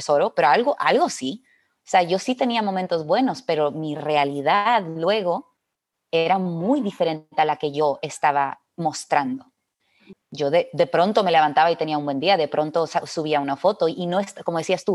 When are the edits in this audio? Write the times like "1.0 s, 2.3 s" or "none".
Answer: 10.1 s